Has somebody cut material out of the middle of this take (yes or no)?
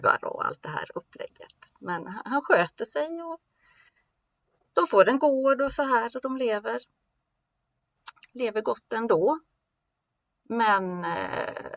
no